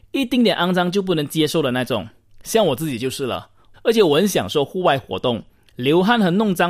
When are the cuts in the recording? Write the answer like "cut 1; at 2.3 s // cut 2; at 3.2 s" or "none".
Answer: cut 1; at 3.7 s

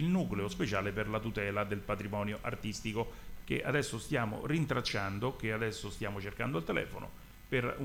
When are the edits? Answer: cut 1; at 3.4 s

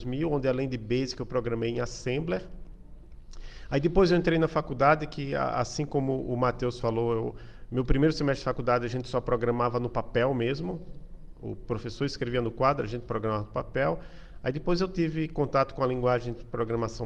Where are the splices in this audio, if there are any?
none

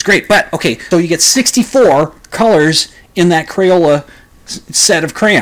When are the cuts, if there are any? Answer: cut 1; at 0.9 s

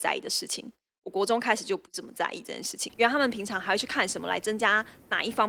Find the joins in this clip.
cut 1; at 2.9 s

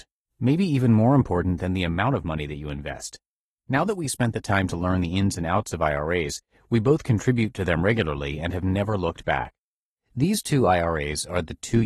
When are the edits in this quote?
cut 1; at 9.9 s

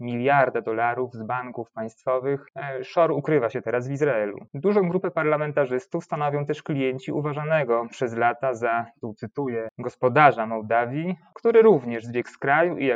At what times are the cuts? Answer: cut 1; at 11.3 s

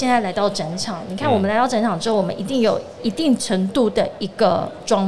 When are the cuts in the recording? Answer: none

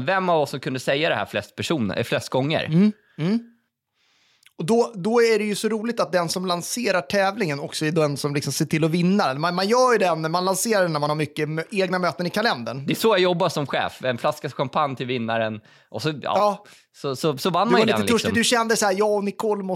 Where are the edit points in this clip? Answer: none

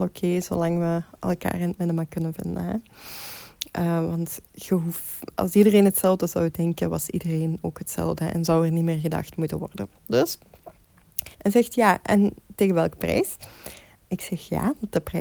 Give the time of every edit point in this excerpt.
cut 1; at 11.3 s

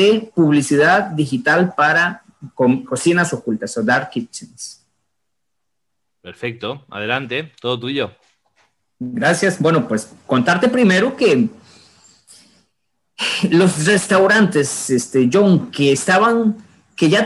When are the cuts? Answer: none

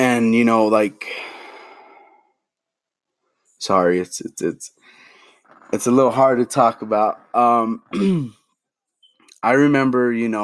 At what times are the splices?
none

